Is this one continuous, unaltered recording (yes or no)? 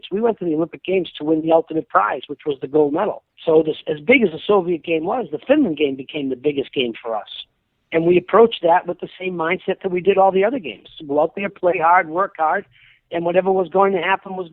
yes